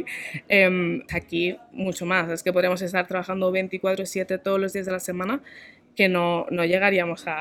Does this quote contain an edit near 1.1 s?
yes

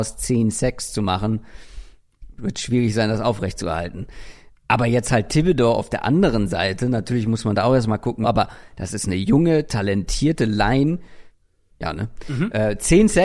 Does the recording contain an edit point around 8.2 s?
yes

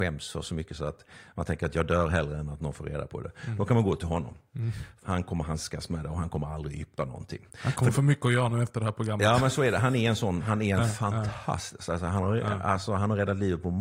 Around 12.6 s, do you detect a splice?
no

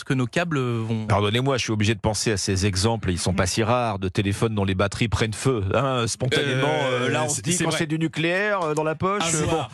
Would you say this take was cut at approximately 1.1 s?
yes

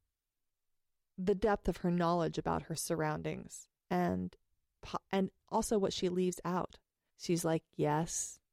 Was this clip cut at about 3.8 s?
yes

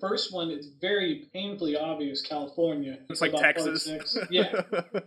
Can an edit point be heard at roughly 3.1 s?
yes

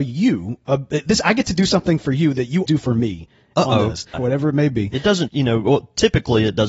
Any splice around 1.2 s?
no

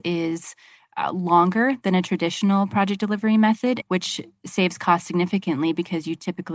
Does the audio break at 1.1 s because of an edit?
no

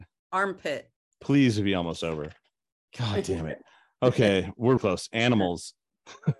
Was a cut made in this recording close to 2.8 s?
no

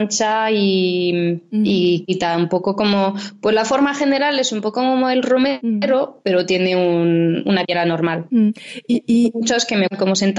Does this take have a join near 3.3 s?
no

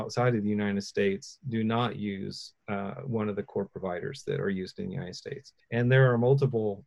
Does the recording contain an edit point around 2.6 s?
no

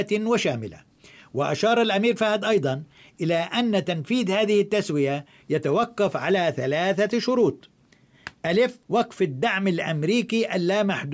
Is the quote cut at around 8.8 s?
yes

